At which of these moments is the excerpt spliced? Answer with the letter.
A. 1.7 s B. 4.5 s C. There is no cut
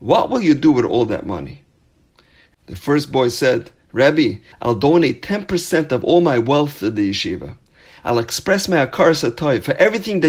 B